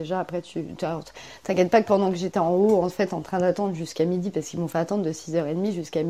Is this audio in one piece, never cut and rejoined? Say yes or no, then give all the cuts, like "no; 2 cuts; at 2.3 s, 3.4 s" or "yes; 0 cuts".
yes; 0 cuts